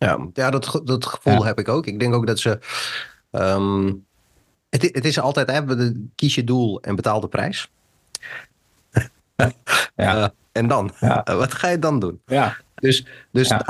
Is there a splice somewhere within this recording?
yes; 1 cut; at 8.5 s

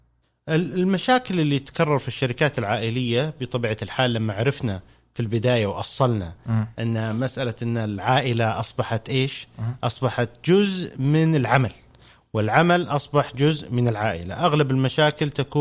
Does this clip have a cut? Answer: no; 0 cuts

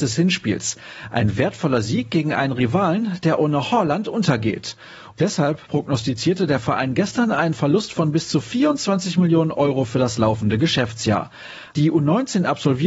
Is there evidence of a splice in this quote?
yes; 2 cuts; at 5.1 s, 11.7 s

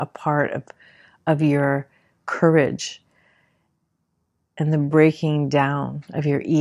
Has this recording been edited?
no; 0 cuts

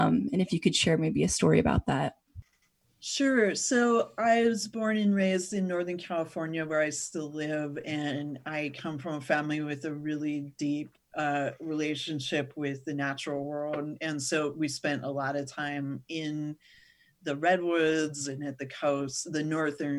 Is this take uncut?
yes; 0 cuts

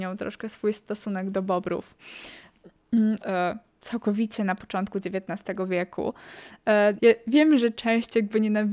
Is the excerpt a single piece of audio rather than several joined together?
no; 2 cuts; at 3.2 s, 7.0 s

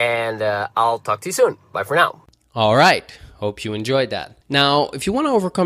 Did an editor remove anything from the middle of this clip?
yes; 1 cut; at 4.4 s

